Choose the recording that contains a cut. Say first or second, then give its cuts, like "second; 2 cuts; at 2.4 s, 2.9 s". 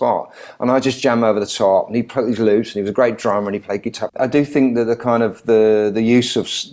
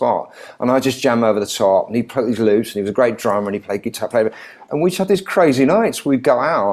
first; 1 cut; at 4.1 s